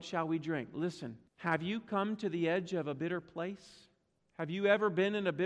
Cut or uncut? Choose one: cut